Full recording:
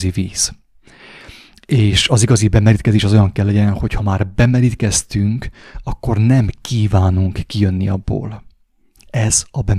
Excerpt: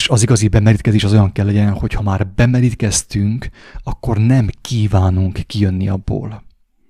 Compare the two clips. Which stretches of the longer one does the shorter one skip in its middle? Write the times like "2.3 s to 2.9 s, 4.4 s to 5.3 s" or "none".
none